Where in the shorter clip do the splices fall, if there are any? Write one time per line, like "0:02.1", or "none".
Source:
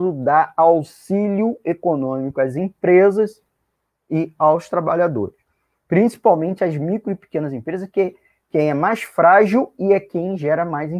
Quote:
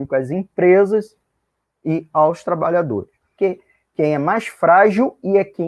0:03.4